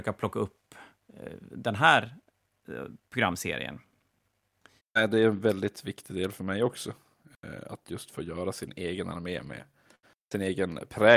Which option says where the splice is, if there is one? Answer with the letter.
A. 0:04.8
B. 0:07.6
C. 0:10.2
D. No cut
A